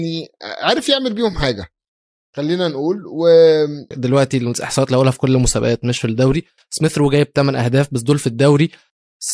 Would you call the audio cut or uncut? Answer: cut